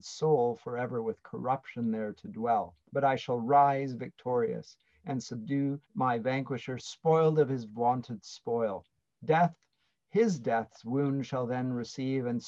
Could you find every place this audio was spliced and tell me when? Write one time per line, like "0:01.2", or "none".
0:02.8
0:05.9

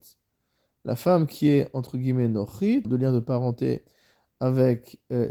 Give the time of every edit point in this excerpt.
0:02.8

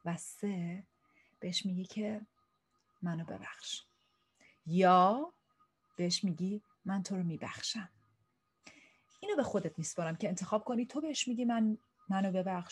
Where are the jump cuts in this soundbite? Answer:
none

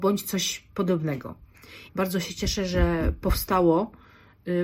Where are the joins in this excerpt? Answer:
0:01.9

